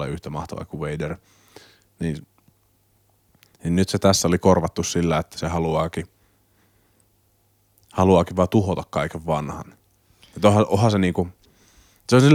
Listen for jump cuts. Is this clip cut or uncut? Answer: uncut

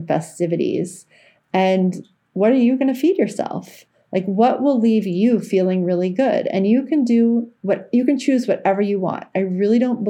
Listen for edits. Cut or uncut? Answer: uncut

